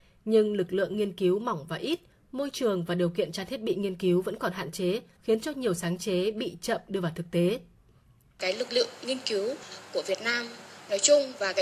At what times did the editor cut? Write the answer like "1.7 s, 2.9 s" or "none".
5.2 s